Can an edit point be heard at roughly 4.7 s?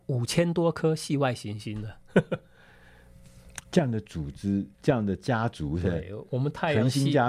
yes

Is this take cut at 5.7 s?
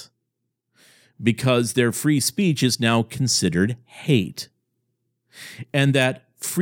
no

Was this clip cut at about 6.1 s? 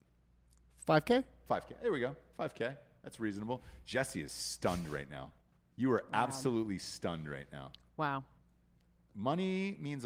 no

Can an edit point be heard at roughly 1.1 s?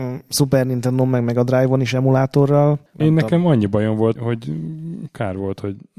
no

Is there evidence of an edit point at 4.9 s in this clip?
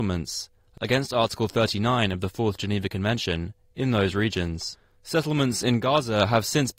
no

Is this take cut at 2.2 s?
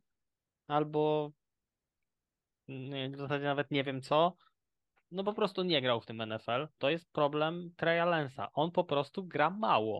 no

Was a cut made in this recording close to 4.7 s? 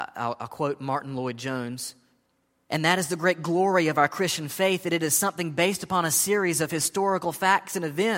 no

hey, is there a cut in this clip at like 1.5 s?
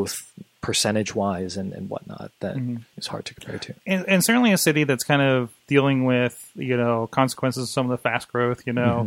no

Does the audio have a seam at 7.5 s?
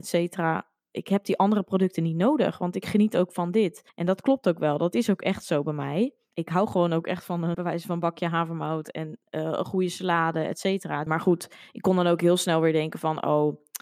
yes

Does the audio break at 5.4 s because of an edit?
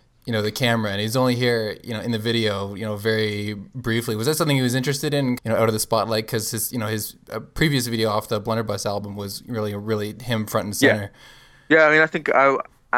yes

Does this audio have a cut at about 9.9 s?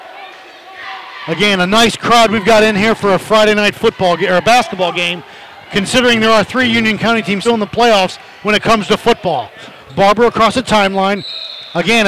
no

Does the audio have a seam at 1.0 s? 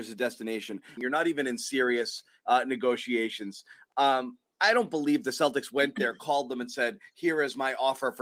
yes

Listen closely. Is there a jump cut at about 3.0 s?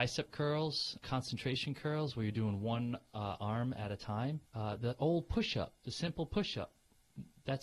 no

